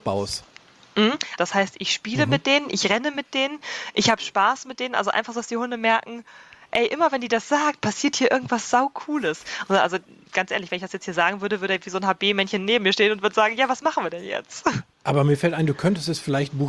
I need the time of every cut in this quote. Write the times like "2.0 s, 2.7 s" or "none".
1.4 s, 9.7 s

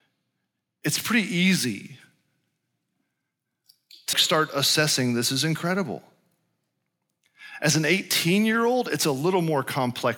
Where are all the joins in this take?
4.1 s

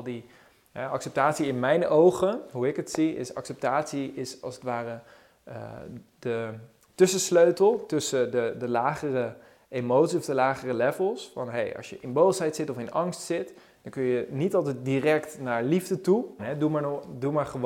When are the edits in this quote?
16.4 s

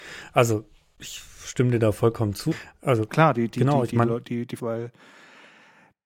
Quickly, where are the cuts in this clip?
2.5 s, 4.6 s

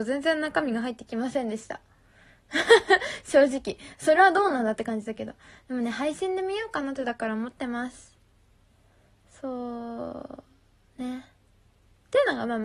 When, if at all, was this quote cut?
none

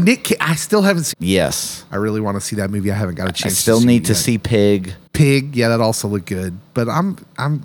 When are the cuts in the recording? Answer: 1.1 s

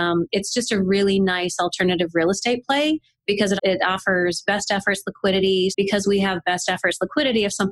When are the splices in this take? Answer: 3.6 s, 5.7 s

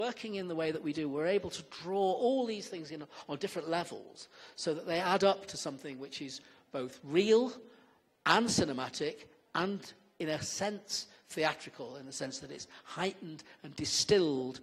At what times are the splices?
none

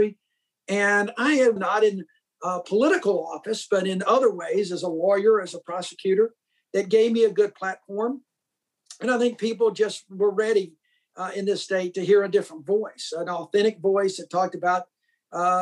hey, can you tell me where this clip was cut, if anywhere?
1.6 s

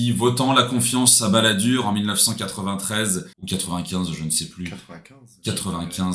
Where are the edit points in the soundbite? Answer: 3.3 s

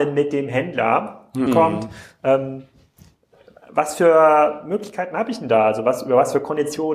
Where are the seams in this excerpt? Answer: 1.5 s

